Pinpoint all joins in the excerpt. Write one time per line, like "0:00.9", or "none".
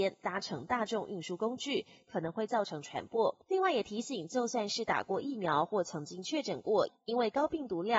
0:03.4
0:06.9